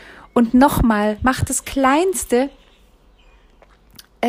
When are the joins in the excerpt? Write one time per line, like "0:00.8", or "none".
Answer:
none